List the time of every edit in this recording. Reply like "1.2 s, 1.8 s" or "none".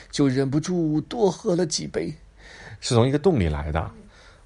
2.8 s